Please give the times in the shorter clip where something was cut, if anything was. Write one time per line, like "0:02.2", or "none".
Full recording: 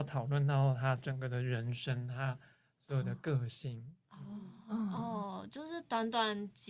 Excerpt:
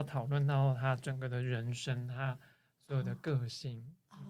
none